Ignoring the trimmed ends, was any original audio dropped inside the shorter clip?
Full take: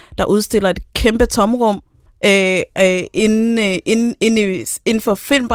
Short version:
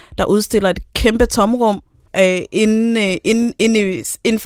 yes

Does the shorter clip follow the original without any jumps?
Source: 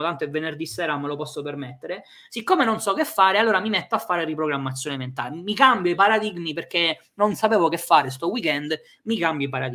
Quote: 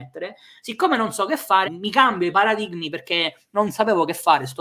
no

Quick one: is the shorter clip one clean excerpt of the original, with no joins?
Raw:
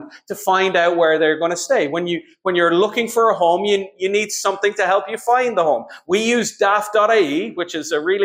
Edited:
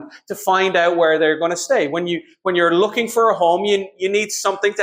yes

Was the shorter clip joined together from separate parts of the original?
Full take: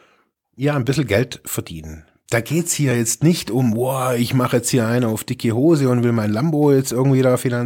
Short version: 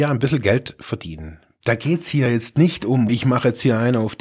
yes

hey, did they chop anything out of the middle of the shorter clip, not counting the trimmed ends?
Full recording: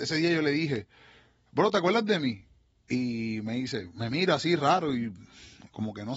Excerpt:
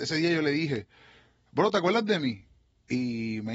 no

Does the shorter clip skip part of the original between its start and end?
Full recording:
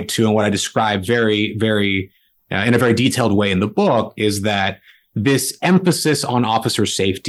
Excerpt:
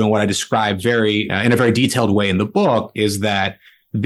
yes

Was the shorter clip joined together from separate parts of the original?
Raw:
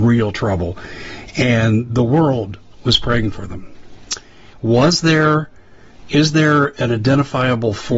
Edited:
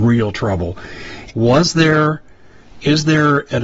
yes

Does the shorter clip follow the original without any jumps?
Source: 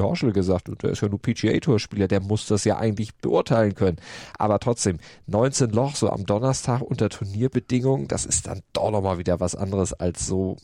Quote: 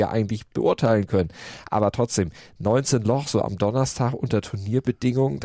yes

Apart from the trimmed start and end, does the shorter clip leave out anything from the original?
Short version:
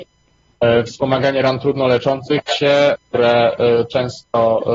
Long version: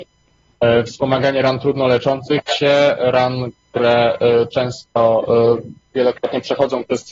yes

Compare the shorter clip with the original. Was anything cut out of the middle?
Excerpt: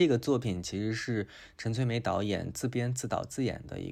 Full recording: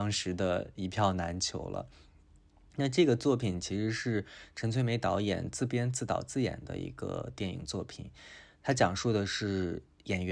no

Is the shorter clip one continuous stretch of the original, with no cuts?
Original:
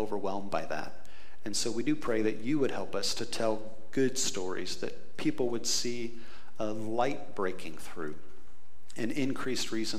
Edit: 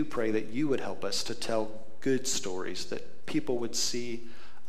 yes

